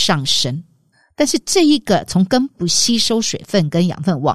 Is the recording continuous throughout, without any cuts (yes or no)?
yes